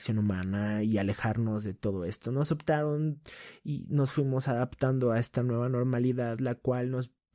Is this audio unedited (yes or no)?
yes